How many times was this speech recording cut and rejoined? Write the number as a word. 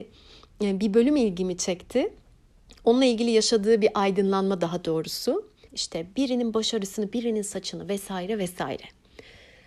two